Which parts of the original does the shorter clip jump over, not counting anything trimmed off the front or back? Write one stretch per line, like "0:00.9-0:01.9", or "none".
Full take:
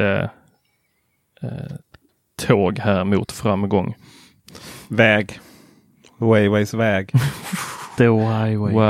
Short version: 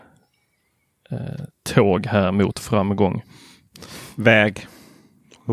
0:01.8-0:02.3